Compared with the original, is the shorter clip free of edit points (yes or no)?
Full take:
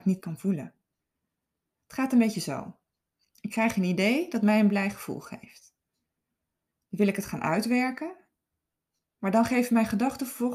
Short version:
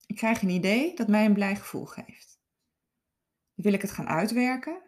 yes